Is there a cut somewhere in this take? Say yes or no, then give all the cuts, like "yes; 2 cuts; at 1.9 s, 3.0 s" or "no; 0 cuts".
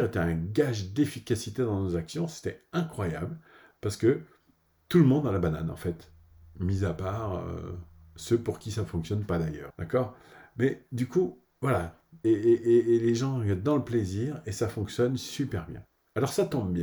yes; 2 cuts; at 9.7 s, 12.2 s